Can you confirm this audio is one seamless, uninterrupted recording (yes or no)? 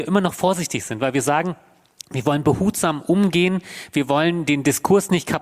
yes